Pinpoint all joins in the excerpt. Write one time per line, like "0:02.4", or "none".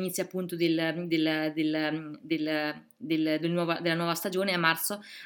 none